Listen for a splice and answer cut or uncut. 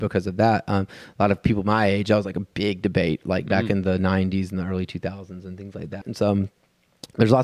cut